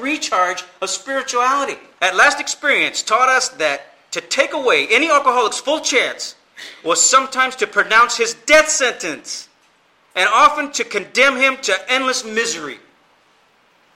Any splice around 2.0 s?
yes; 1 cut; at 2.0 s

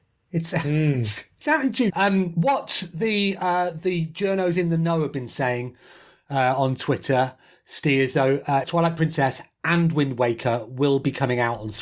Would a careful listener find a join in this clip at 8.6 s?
yes; 2 cuts; at 1.9 s, 8.6 s

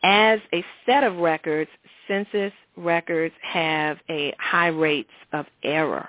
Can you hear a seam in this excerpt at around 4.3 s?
yes; 1 cut; at 4.3 s

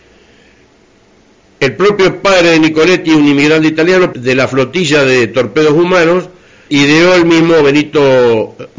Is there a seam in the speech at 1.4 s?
no; 2 cuts; at 4.1 s, 6.7 s

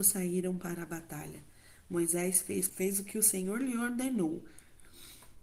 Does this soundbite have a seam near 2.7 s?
yes; 1 cut; at 2.7 s

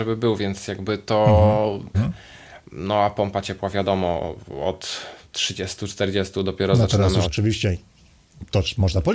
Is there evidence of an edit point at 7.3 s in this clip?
yes; 2 cuts; at 1.9 s, 7.3 s

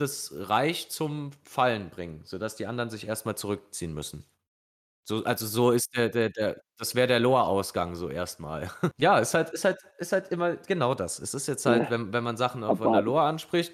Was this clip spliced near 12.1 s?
no; 1 cut; at 8.9 s

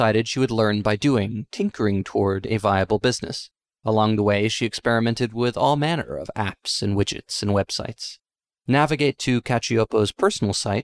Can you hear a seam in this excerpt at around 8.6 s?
no; 1 cut; at 3.7 s

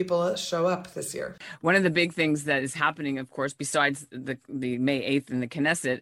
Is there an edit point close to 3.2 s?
no; 0 cuts

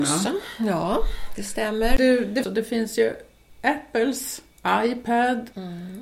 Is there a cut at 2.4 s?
yes; 1 cut; at 2.4 s

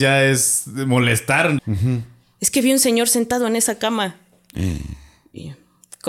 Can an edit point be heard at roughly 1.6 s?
yes; 1 cut; at 1.6 s

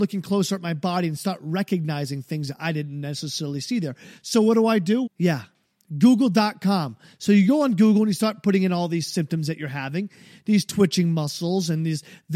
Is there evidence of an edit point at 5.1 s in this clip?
yes; 1 cut; at 5.1 s

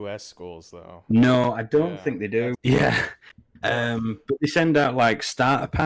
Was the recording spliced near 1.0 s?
no; 1 cut; at 2.5 s

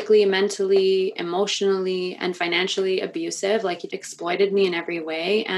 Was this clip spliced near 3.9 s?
yes; 1 cut; at 3.9 s

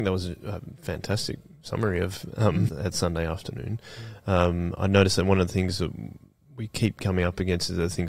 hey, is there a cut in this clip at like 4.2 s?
no; 1 cut; at 2.7 s

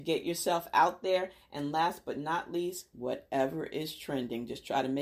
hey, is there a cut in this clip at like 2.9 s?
yes; 1 cut; at 2.9 s

